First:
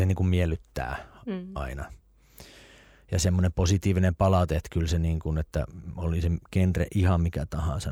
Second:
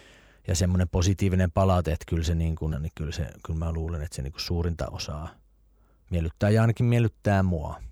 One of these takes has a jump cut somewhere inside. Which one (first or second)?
second